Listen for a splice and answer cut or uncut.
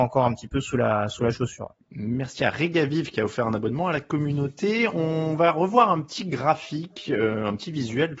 cut